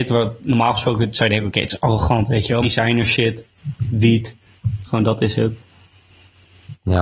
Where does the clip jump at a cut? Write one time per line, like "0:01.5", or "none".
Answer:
0:02.6